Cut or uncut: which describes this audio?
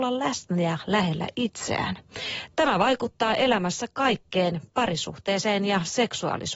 uncut